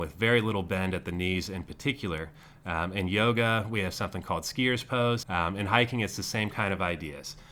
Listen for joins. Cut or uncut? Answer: cut